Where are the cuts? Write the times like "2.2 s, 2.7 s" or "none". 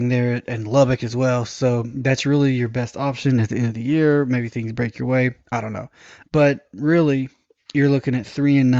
6.2 s